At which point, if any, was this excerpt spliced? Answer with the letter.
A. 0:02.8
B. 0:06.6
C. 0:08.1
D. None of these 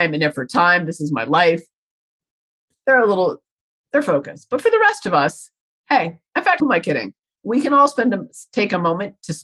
B